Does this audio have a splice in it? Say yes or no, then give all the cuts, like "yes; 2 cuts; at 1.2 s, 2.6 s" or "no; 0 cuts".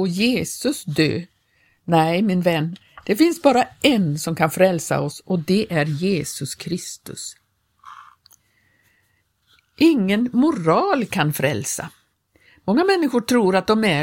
no; 0 cuts